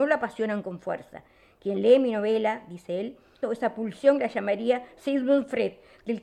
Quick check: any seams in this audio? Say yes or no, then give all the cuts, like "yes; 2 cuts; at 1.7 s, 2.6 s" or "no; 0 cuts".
yes; 1 cut; at 3.4 s